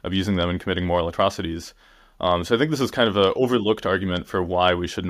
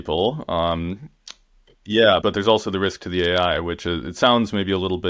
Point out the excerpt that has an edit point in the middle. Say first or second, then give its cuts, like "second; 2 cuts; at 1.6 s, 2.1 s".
second; 1 cut; at 2.2 s